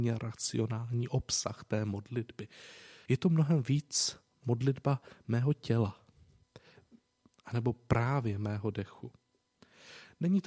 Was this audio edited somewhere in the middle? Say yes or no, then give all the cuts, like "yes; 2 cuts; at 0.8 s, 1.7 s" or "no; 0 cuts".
yes; 2 cuts; at 3.1 s, 7.3 s